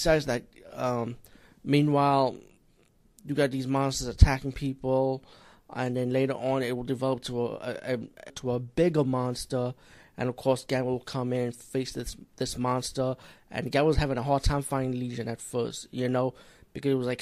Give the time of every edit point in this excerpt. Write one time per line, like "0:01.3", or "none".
0:08.3